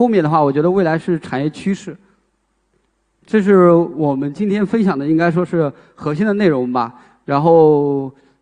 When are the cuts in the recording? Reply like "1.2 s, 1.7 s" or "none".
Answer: none